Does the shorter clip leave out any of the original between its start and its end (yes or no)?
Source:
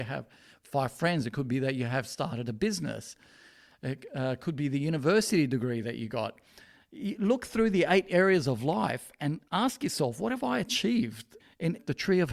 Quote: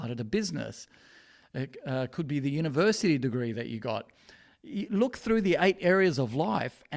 no